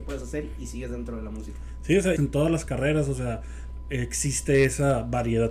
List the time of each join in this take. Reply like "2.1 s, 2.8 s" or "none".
2.2 s